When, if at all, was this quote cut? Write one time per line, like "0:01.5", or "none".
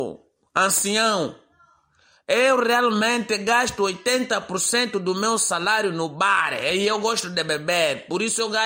none